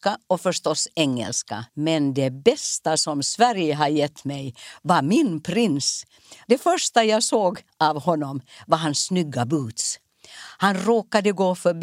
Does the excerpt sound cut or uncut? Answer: cut